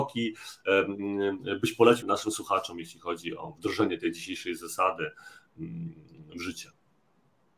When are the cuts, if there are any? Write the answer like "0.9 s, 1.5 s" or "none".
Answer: 2.0 s